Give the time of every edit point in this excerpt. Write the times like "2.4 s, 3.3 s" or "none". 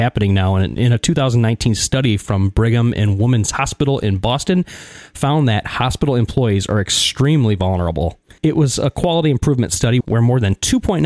8.4 s, 10.0 s